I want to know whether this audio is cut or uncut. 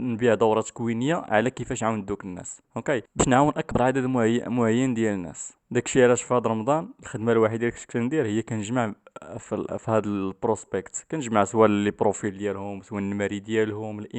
uncut